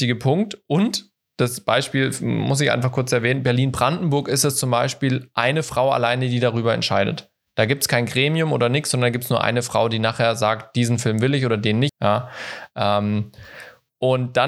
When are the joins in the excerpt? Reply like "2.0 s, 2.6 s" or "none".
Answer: 11.9 s